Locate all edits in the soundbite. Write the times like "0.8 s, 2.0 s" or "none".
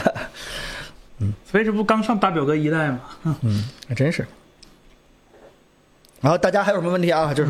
none